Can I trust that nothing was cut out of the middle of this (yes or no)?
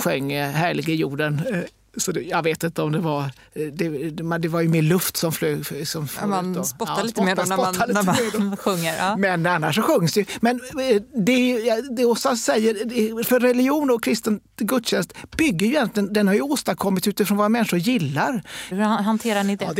no